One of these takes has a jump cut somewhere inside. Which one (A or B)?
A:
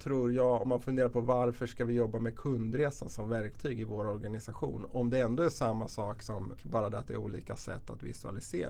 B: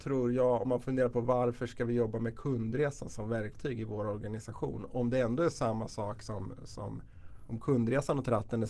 A